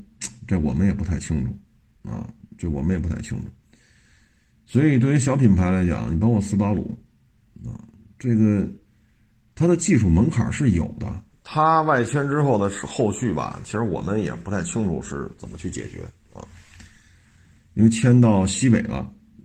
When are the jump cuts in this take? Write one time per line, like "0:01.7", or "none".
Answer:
0:11.3